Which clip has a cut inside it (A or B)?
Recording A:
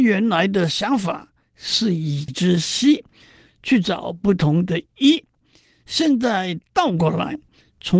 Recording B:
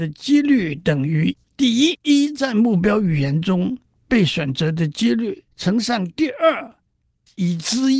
B